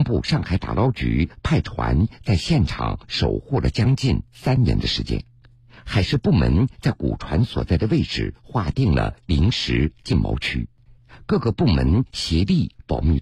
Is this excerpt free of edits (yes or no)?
yes